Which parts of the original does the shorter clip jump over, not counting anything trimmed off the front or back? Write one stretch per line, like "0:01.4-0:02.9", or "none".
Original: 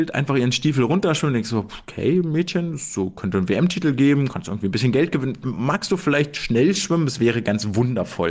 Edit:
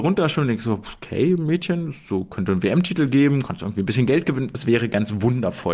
0:05.4-0:07.1